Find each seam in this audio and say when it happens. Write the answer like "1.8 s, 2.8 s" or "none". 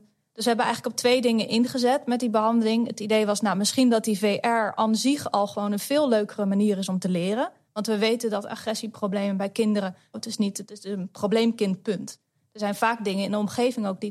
7.7 s, 10.1 s

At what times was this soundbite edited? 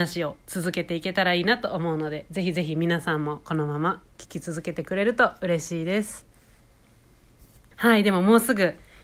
7.7 s

